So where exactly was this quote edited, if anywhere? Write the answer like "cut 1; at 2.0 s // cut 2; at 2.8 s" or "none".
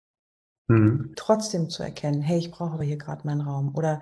cut 1; at 1.1 s